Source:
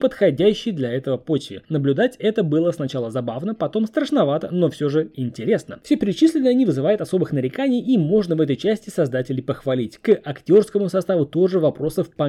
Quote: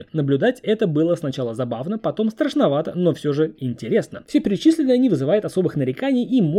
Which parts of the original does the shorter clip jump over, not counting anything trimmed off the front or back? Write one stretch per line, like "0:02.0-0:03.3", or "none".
none